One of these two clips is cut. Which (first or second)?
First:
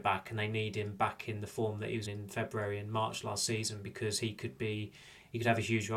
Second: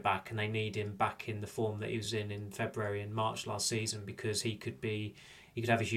first